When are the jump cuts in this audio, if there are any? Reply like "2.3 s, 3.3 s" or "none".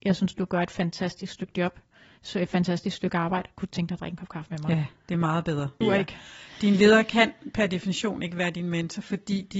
5.8 s